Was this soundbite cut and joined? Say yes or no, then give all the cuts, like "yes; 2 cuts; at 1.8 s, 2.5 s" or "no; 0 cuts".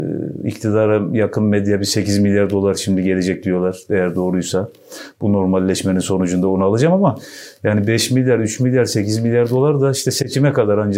no; 0 cuts